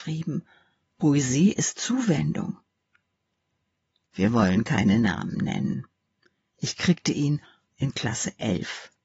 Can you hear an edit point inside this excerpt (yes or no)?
yes